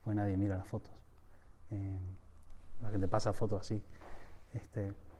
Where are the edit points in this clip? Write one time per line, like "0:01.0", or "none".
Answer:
none